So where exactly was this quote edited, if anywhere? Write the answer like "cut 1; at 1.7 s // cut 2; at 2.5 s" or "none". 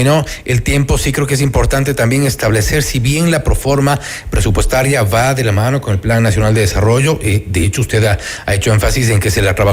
none